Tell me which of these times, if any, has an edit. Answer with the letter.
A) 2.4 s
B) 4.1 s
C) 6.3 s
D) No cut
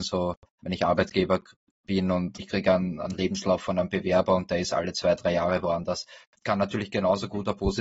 A